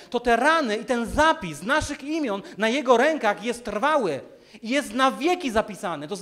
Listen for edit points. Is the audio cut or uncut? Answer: uncut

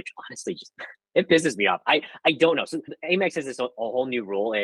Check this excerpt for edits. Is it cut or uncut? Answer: uncut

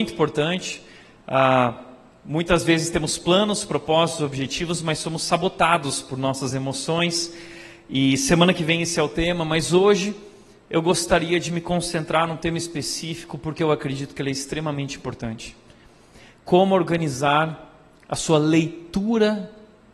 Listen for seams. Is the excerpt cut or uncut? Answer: uncut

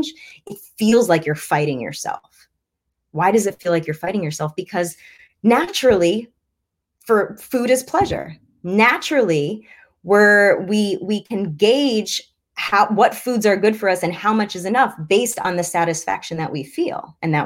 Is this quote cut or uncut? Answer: uncut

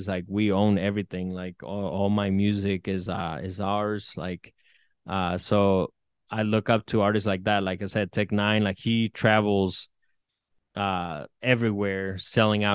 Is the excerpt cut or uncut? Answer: uncut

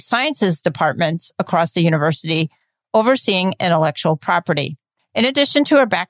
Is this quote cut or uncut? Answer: cut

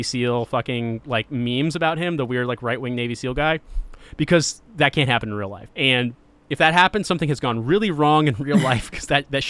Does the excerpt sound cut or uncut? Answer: cut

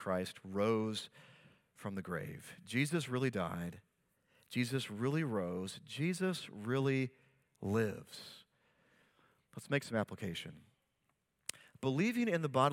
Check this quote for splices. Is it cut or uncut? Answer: uncut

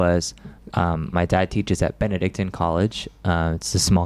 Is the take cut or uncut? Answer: cut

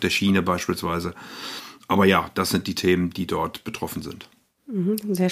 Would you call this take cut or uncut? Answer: uncut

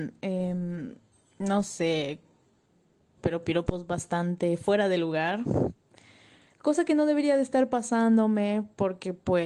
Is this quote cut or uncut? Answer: cut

